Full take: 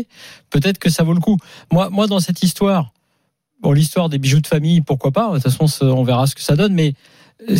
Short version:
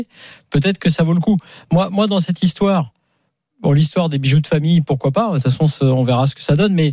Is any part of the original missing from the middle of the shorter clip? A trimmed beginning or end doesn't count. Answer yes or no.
no